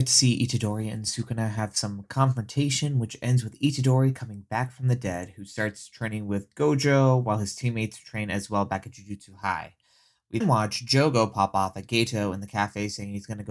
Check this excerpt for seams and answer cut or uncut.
cut